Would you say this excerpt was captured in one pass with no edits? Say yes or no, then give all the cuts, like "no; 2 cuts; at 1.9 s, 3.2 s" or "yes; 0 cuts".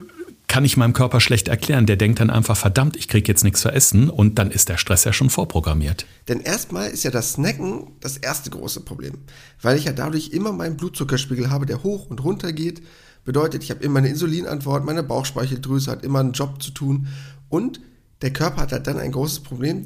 no; 1 cut; at 6.2 s